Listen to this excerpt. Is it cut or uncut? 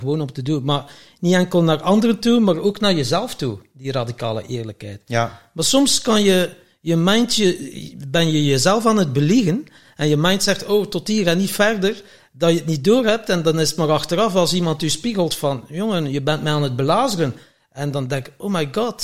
uncut